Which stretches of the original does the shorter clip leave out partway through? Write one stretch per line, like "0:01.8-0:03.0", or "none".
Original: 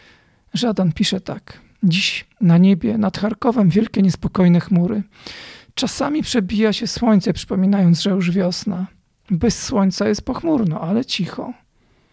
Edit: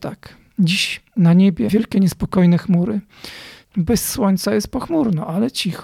0:02.9-0:03.7
0:05.7-0:09.2